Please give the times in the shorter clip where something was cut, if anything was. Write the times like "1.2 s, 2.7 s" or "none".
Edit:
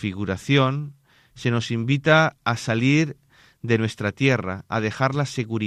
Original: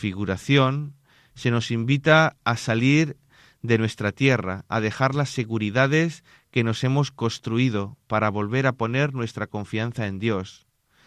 none

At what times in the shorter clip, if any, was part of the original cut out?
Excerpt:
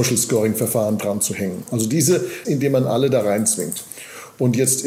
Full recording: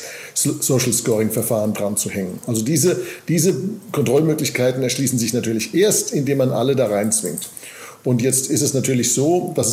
2.4 s

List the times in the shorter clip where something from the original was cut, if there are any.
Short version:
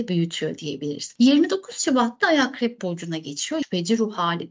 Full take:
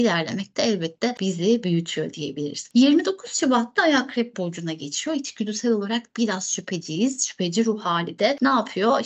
3.6 s

